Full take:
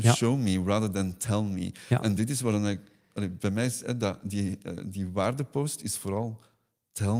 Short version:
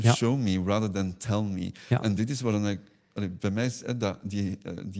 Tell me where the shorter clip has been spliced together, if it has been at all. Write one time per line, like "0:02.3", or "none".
none